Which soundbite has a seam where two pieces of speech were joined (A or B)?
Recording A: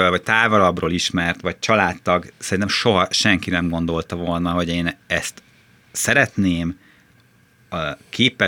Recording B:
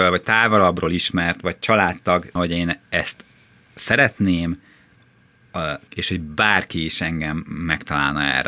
B